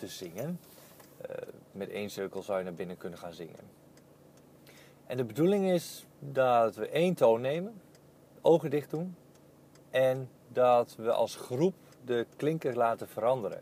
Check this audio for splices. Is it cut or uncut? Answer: cut